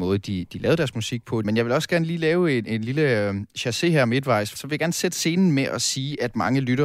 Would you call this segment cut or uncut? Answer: cut